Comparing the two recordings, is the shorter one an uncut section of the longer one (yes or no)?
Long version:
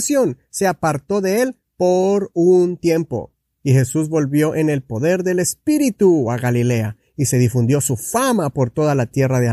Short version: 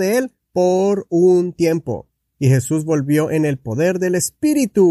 yes